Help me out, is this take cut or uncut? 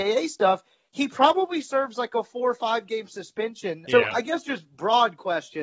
cut